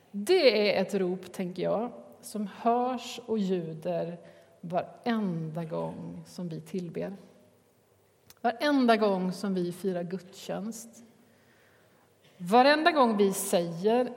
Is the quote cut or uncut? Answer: uncut